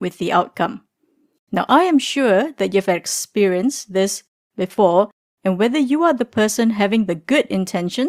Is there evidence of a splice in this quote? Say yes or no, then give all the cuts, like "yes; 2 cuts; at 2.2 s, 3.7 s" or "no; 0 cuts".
no; 0 cuts